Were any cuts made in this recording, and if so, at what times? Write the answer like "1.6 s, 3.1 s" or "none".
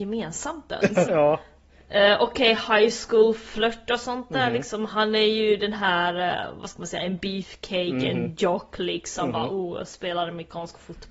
1.0 s